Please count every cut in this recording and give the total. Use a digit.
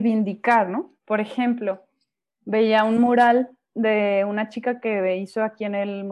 1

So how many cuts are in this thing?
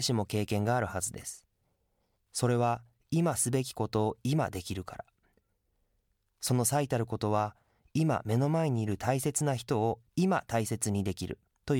1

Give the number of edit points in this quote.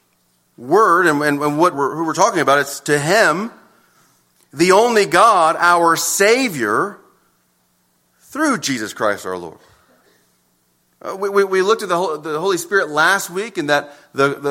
1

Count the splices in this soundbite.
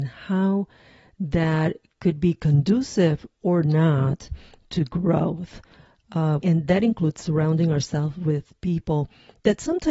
1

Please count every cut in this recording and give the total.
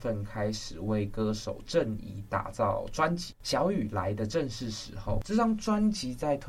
0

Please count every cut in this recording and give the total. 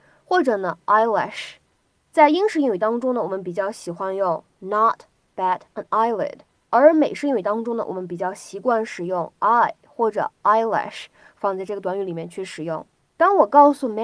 1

